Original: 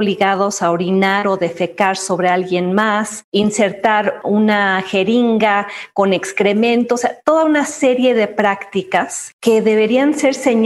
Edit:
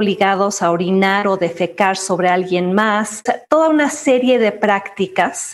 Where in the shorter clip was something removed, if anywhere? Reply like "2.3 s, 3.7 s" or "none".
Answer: 3.3 s